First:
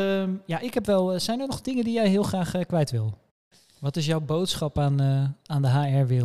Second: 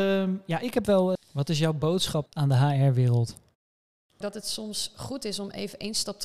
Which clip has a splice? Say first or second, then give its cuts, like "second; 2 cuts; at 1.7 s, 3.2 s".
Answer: second; 2 cuts; at 1.2 s, 2.3 s